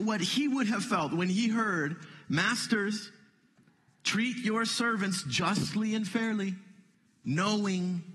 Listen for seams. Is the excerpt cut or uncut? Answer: uncut